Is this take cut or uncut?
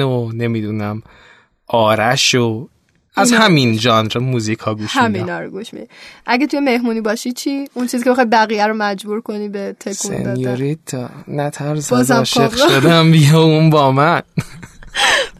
uncut